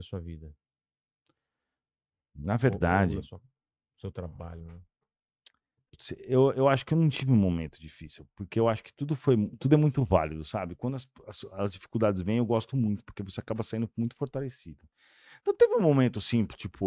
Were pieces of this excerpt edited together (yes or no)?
no